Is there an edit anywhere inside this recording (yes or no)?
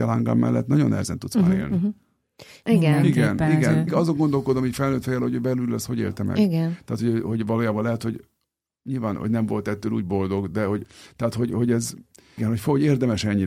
yes